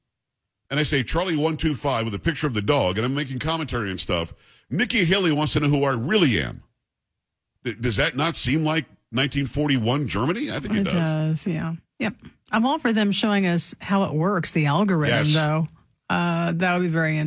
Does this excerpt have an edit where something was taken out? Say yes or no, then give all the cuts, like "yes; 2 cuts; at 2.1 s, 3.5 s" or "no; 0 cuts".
no; 0 cuts